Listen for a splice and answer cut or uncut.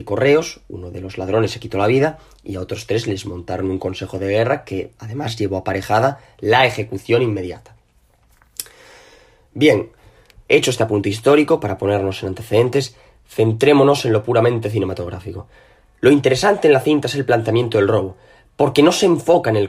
uncut